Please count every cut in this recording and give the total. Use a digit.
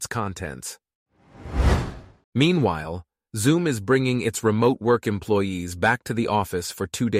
1